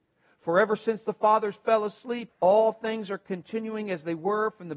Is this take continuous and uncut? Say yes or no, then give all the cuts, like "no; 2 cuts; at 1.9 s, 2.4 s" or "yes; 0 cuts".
no; 1 cut; at 2.3 s